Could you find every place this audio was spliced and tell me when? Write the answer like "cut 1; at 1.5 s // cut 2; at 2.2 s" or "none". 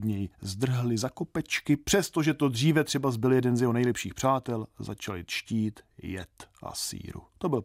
none

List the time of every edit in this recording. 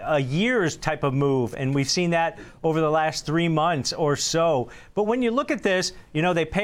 none

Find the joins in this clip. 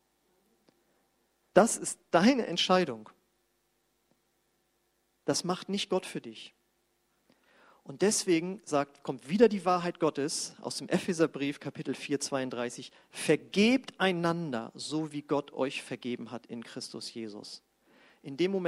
none

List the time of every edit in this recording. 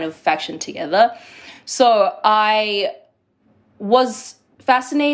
none

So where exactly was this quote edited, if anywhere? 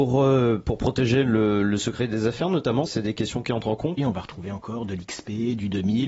cut 1; at 2.9 s // cut 2; at 4.0 s

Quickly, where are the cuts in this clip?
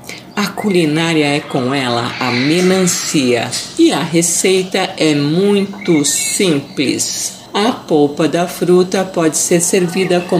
none

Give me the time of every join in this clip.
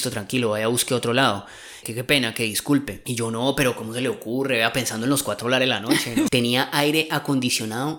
cut 1; at 6.3 s

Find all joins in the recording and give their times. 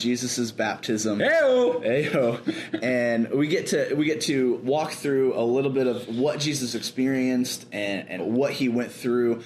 cut 1; at 8.2 s

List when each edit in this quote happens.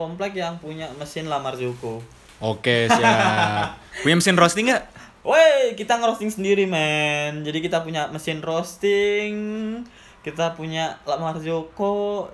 none

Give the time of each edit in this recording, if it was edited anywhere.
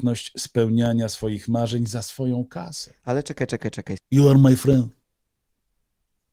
cut 1; at 4.0 s

